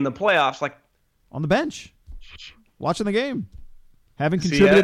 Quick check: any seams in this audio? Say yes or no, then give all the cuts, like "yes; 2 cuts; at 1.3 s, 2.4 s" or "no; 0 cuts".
yes; 1 cut; at 1.2 s